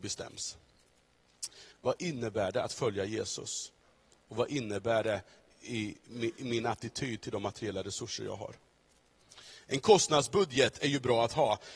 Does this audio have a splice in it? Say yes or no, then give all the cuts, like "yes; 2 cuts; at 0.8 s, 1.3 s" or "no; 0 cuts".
yes; 1 cut; at 1.7 s